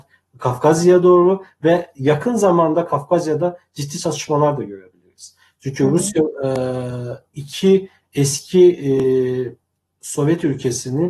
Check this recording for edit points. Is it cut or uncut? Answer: uncut